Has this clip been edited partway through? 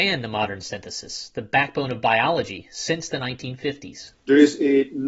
yes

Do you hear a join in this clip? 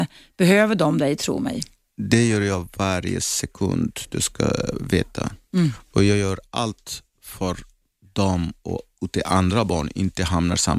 no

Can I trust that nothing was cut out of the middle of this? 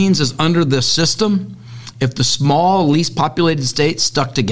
yes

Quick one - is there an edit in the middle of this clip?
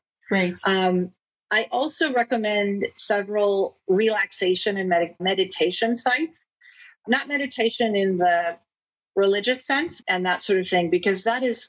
yes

